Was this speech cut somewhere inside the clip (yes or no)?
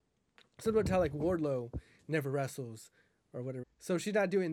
yes